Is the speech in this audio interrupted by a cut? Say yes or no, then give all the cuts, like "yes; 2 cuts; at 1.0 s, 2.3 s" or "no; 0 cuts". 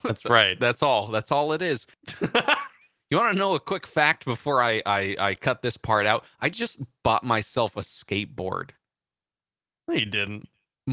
no; 0 cuts